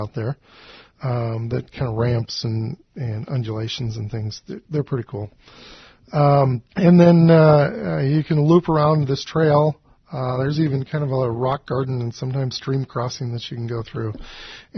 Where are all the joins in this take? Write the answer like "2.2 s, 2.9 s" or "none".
6.7 s